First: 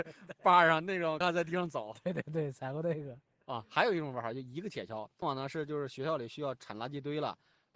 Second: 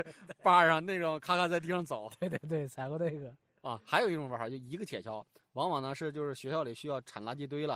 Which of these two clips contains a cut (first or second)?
first